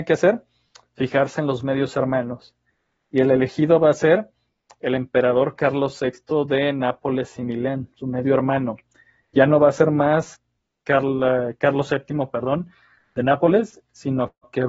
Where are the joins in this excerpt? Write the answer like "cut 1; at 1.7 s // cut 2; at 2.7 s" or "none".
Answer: none